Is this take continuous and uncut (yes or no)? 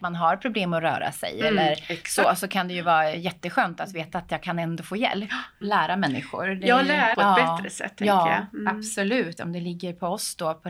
no